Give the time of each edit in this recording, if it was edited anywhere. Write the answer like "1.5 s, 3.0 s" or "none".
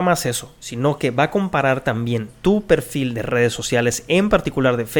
none